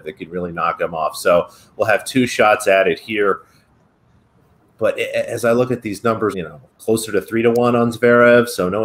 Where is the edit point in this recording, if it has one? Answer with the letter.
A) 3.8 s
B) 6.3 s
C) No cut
B